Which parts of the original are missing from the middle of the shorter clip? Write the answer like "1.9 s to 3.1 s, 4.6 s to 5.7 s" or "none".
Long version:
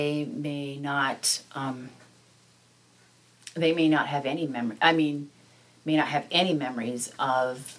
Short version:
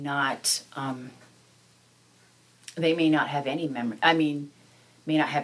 none